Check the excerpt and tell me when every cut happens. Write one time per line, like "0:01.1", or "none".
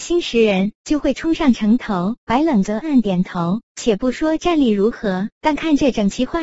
0:02.8